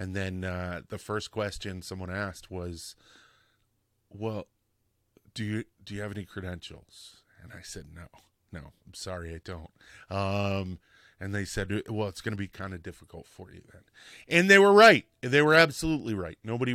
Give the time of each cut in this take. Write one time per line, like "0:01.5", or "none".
0:05.7